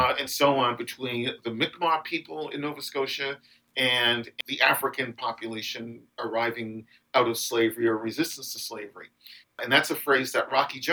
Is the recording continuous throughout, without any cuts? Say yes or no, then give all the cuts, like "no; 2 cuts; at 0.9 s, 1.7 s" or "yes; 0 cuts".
no; 1 cut; at 9.4 s